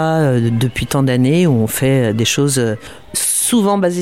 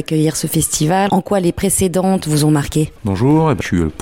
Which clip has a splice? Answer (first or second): second